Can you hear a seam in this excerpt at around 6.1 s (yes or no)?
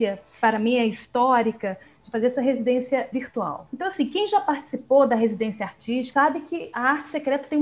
yes